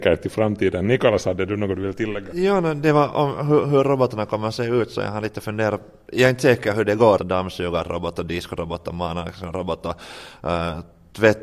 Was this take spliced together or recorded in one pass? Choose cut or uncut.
cut